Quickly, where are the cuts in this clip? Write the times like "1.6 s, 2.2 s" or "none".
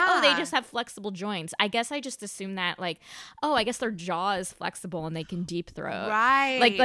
none